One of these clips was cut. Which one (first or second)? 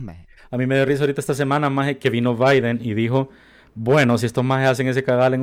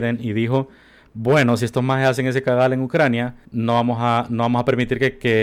second